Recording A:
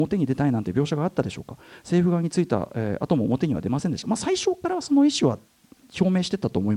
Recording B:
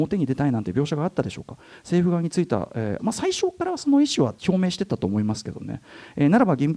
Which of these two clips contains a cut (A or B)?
B